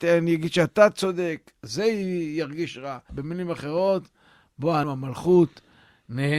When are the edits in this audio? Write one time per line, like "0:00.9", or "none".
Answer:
0:03.1
0:04.8